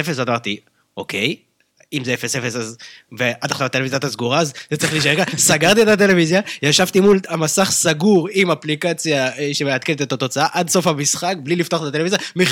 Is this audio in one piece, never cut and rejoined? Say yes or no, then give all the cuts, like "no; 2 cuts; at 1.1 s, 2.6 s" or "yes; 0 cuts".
yes; 0 cuts